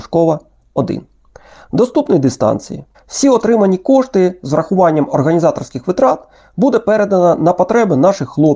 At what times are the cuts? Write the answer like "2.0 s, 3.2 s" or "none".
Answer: 2.9 s